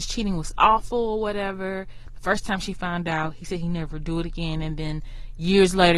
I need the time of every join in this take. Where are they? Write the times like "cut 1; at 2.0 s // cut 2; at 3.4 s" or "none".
none